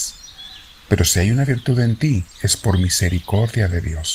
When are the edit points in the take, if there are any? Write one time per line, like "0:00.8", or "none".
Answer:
0:02.3